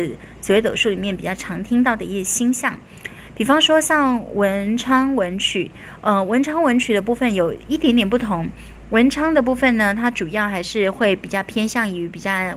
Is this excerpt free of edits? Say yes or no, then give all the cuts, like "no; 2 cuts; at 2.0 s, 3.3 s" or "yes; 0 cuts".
yes; 0 cuts